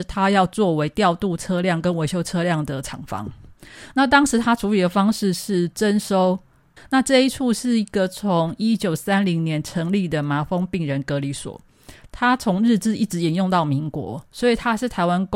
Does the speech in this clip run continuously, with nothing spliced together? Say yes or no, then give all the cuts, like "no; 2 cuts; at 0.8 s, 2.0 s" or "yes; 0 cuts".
no; 1 cut; at 6.8 s